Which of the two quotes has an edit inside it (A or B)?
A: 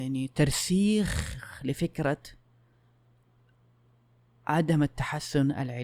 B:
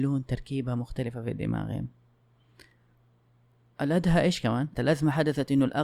B